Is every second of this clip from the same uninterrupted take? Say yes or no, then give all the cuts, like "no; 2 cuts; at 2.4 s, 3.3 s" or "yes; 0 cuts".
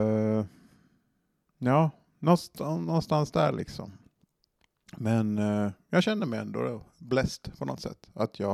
yes; 0 cuts